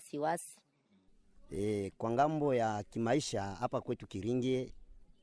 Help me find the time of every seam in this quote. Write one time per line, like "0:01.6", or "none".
none